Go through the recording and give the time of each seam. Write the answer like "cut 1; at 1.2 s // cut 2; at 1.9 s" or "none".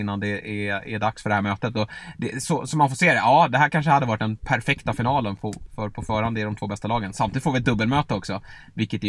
none